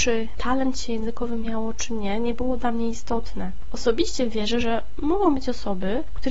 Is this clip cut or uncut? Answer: uncut